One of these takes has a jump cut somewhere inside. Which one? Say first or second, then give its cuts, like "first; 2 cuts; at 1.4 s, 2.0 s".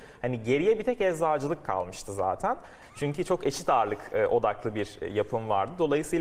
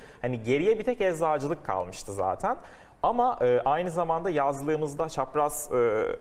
first; 1 cut; at 2.8 s